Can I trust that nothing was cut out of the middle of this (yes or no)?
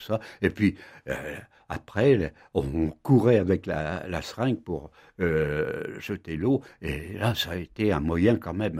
yes